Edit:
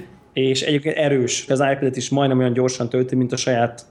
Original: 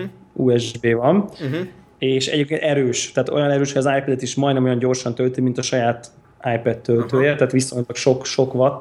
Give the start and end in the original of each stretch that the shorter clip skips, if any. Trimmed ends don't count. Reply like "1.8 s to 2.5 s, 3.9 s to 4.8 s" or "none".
3.1 s to 3.7 s

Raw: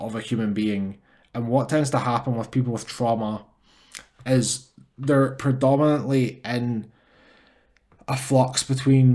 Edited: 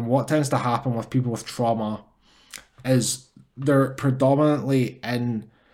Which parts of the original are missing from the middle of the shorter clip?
none

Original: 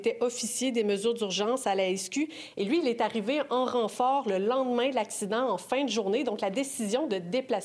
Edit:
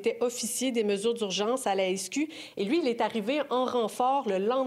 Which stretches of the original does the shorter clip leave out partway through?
none

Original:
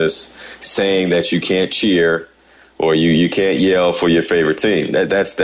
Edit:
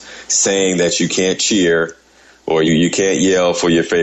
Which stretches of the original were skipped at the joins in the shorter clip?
3.0 s to 3.0 s

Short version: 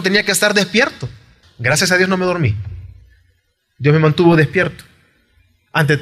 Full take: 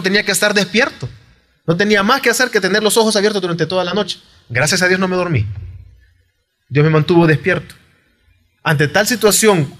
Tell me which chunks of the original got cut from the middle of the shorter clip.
1.4 s to 4.3 s

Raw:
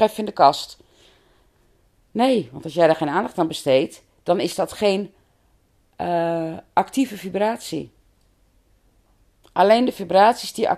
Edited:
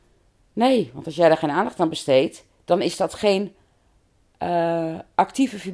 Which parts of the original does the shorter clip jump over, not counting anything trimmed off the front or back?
none

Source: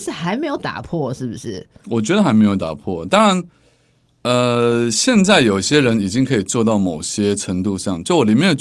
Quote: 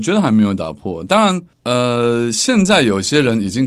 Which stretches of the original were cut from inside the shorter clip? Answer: 3.5 s to 4.1 s

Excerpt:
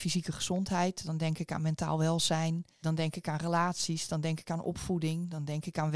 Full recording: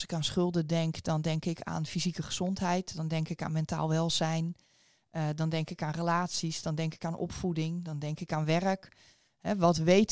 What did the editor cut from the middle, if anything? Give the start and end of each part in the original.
4.7 s to 5.4 s

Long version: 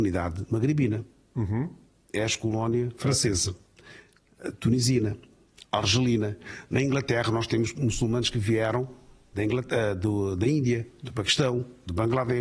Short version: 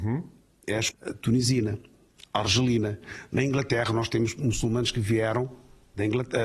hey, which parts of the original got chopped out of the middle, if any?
2.4 s to 4.3 s

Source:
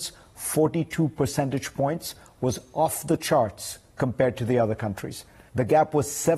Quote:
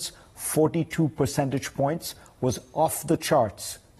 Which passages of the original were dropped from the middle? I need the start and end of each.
none

